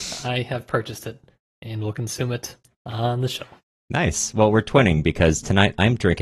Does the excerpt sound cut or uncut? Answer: uncut